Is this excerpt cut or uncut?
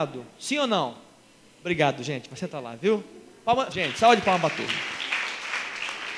cut